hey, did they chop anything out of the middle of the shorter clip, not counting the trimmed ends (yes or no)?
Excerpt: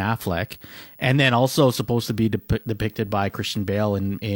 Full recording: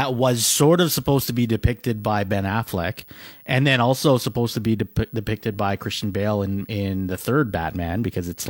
no